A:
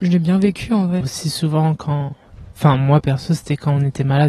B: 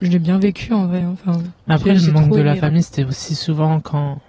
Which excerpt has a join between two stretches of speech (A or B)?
A